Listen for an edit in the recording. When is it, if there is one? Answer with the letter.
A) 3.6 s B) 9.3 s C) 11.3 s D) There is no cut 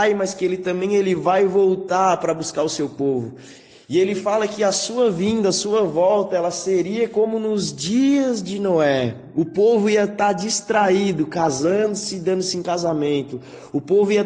D